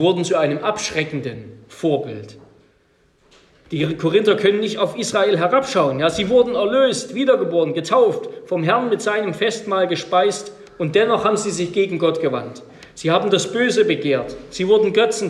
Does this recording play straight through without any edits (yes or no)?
yes